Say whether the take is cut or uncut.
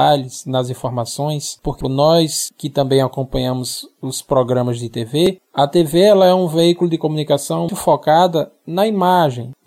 cut